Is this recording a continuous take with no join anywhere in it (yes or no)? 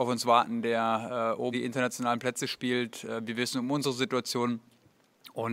no